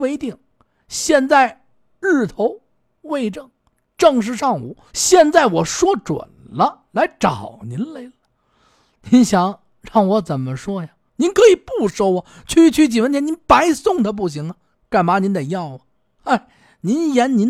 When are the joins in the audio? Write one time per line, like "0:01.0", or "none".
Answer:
0:04.9
0:11.1